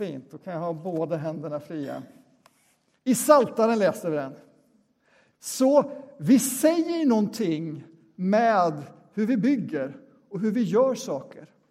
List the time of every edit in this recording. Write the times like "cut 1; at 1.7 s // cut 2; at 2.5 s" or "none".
cut 1; at 3.0 s // cut 2; at 5.3 s